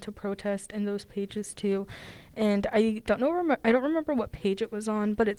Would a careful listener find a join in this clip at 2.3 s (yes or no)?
no